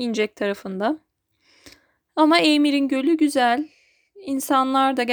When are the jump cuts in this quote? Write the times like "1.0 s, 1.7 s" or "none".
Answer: none